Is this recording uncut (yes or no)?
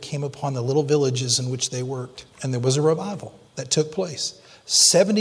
no